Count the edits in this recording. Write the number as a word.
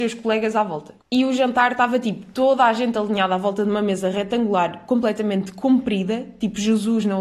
one